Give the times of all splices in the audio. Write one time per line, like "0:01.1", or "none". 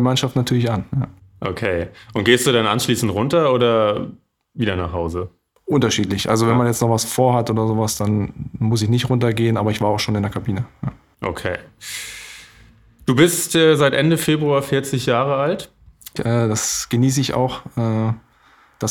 0:16.2